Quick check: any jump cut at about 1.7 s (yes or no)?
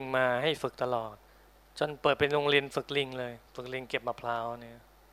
no